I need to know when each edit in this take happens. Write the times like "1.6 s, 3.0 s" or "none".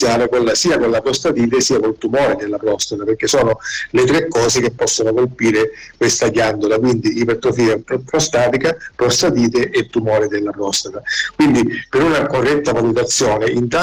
none